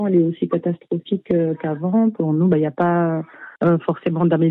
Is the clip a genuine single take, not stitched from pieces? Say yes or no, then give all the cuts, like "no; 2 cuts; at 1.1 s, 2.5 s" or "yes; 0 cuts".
no; 1 cut; at 3.6 s